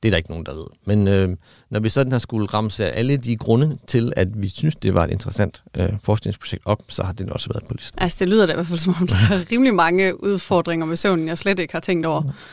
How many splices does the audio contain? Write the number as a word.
zero